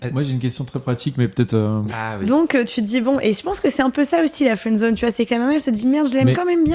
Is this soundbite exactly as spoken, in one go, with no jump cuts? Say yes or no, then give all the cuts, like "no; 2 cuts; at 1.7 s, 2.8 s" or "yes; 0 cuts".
no; 1 cut; at 1.9 s